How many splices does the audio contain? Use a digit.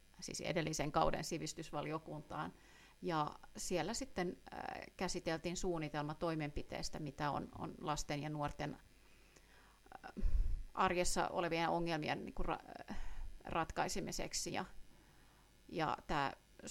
1